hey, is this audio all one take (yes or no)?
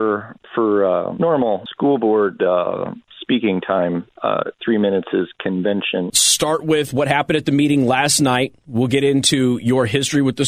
no